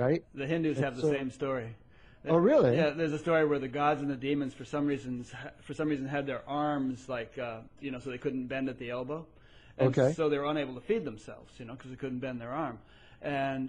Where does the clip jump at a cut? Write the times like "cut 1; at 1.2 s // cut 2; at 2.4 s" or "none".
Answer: cut 1; at 7.8 s